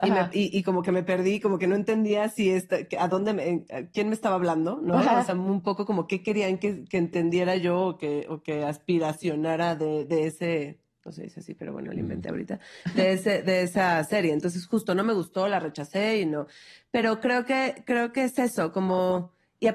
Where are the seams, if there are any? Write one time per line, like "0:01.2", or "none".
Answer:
none